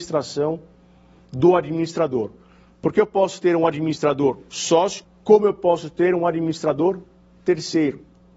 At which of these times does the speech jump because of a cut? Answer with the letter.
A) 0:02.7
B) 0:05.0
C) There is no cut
B